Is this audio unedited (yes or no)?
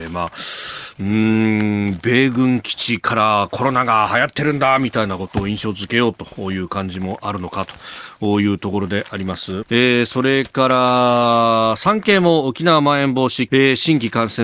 no